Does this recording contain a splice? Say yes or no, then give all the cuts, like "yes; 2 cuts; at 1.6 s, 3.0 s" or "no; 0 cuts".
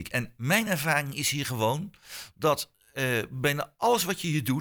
no; 0 cuts